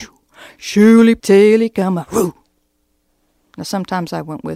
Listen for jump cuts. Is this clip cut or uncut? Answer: cut